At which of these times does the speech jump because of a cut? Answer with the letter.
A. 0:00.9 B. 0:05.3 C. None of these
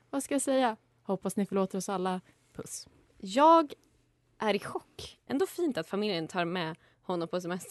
B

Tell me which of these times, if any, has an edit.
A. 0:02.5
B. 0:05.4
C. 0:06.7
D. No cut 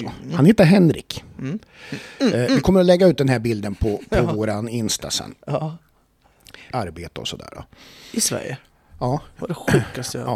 C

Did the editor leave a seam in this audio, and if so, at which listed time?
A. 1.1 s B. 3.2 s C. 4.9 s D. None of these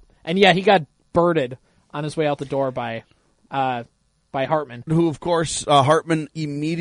C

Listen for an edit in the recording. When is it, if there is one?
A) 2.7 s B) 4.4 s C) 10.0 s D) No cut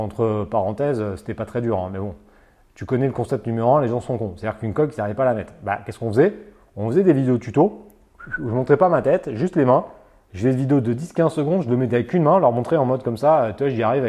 D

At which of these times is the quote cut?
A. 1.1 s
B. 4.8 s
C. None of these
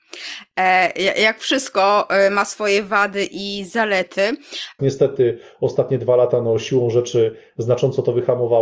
B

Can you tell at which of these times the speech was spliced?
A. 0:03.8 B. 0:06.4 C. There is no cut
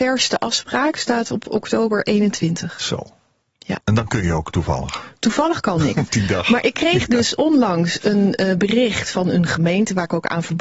A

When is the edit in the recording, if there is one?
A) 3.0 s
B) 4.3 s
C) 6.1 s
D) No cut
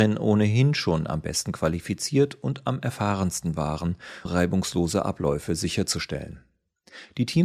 B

